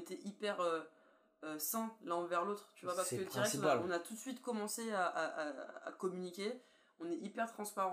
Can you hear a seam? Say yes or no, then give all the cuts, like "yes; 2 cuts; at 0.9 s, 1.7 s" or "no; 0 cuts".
no; 0 cuts